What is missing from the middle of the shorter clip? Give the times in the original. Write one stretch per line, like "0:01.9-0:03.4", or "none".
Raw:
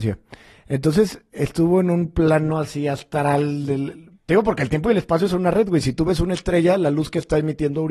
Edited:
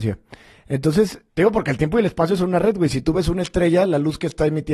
0:01.3-0:04.2